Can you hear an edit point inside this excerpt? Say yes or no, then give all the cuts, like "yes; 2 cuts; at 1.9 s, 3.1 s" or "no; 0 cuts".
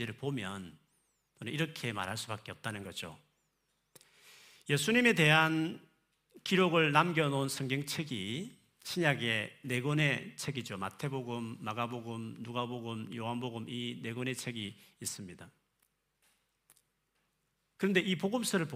no; 0 cuts